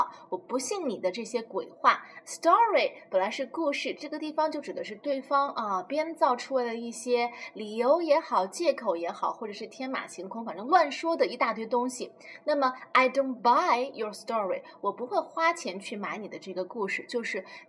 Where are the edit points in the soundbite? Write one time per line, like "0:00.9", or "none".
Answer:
0:02.2